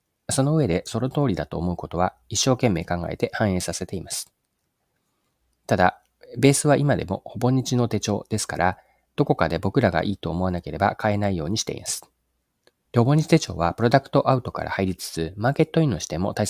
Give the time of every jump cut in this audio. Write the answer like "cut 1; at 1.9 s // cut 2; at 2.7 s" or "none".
cut 1; at 12.9 s